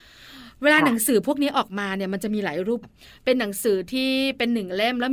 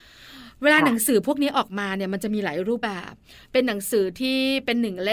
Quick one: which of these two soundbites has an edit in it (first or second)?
first